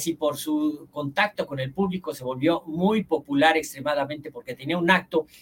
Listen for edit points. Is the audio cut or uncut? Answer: uncut